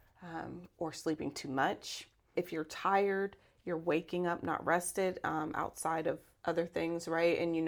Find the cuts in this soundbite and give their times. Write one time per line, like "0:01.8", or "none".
0:02.3